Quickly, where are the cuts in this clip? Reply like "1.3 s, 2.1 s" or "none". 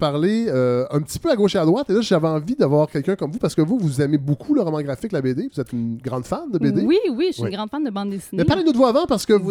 none